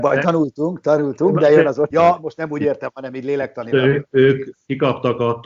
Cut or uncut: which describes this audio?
cut